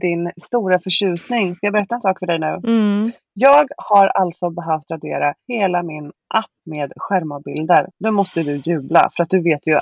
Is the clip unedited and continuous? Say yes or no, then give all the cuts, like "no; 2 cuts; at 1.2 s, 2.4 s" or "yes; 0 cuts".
yes; 0 cuts